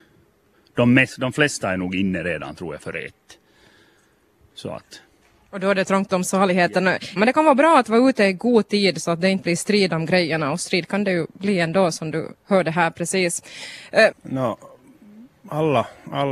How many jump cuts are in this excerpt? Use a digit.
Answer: 2